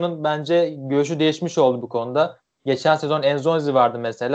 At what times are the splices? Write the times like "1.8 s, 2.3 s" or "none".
none